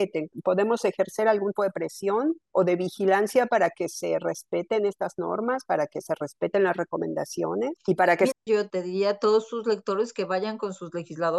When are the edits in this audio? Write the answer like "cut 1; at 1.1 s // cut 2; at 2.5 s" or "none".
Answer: cut 1; at 1.6 s // cut 2; at 8.3 s

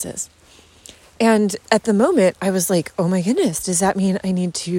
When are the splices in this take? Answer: none

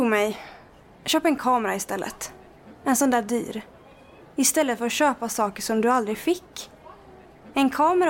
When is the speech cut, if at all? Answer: cut 1; at 4.2 s

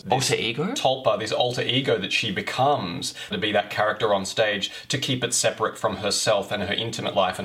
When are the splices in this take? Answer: cut 1; at 3.3 s

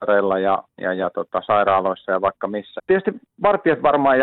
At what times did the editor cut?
cut 1; at 2.8 s

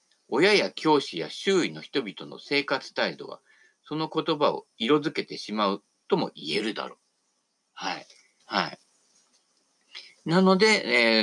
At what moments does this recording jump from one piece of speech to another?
cut 1; at 8.4 s

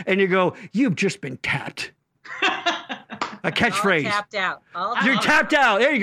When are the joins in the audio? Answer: cut 1; at 2.0 s

